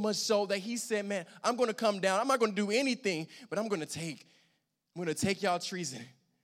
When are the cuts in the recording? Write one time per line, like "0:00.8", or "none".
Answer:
none